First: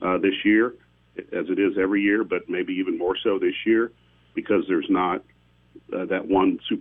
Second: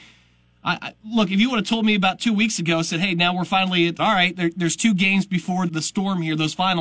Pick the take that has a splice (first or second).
second